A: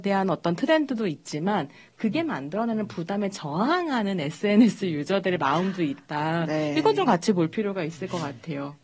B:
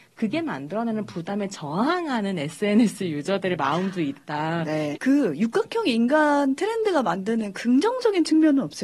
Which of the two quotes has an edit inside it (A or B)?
B